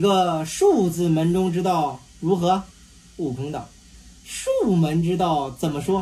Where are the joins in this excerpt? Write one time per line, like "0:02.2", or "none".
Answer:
0:02.7